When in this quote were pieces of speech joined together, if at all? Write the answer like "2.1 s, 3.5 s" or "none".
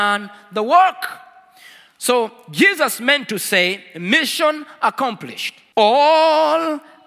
none